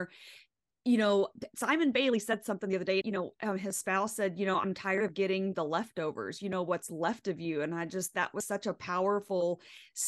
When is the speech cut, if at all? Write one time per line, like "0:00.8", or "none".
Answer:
0:03.0